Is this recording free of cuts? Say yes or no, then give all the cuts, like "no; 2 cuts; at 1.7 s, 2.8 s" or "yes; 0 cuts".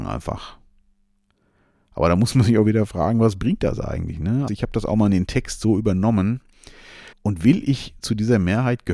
no; 2 cuts; at 4.5 s, 7.1 s